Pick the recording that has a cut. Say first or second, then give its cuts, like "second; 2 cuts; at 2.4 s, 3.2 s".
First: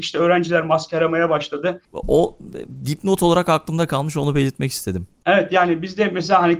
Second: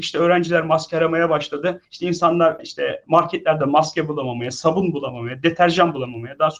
first; 1 cut; at 1.8 s